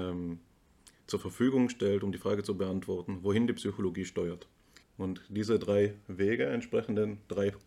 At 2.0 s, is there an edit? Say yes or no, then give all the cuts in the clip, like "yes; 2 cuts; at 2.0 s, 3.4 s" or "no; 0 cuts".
no; 1 cut; at 4.8 s